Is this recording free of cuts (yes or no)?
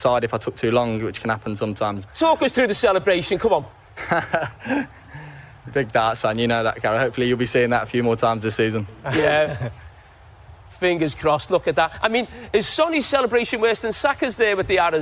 no